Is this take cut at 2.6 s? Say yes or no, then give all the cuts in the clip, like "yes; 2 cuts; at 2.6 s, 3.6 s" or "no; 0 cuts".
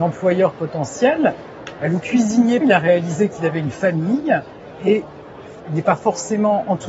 yes; 1 cut; at 2.6 s